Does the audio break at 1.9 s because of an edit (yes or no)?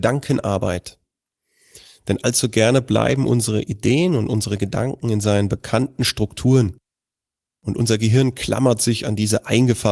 no